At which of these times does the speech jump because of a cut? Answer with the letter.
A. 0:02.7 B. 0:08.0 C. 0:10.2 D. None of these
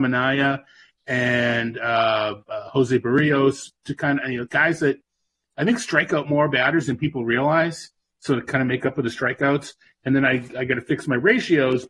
D